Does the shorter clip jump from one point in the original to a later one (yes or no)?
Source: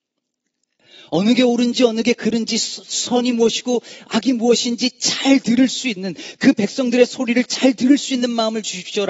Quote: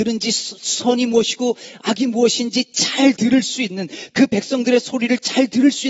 no